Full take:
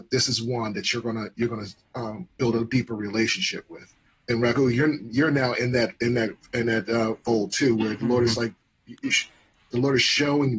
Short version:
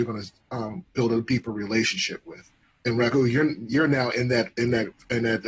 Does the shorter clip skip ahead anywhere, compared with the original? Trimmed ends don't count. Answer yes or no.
no